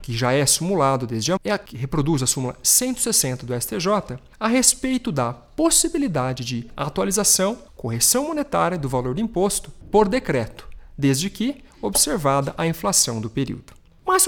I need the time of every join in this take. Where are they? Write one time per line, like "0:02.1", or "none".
0:01.4